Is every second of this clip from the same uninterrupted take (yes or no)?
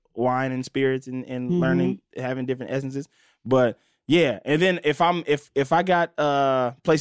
yes